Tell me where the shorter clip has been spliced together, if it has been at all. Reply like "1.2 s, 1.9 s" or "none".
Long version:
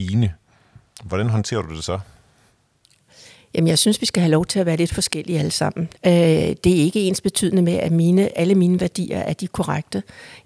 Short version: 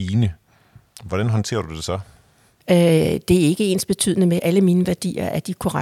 2.6 s, 4.4 s